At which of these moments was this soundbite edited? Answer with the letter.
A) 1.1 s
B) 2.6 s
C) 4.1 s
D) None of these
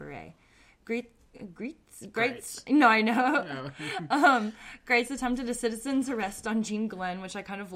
D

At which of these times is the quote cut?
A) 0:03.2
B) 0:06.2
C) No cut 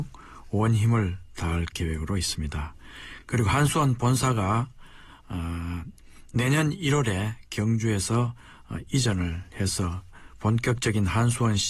C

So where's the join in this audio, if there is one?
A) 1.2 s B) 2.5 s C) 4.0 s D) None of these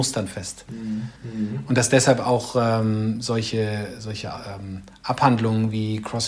A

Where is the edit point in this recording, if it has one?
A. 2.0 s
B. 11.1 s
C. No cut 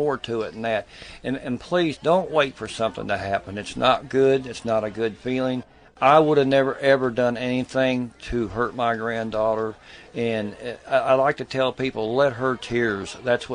A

